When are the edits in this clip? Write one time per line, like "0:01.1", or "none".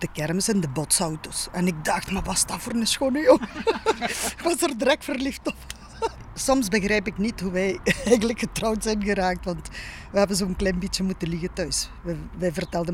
none